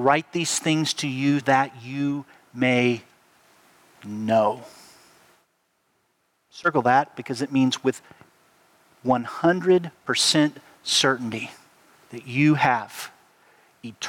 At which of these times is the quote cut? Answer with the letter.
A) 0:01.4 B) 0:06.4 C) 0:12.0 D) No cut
A